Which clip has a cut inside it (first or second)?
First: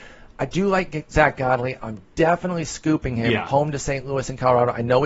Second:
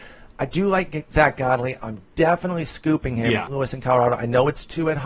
second